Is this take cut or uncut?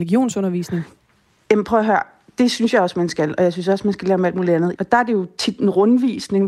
cut